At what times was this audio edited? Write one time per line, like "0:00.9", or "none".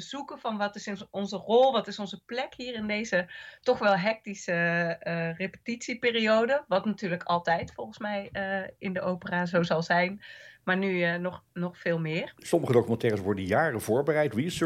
none